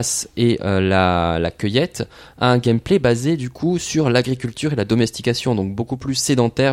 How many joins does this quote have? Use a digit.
0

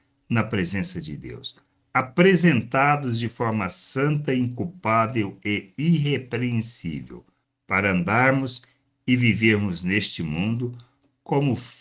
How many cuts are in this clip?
0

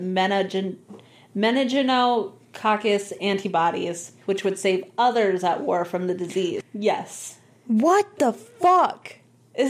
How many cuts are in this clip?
2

